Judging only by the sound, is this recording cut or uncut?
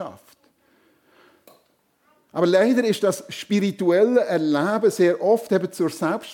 uncut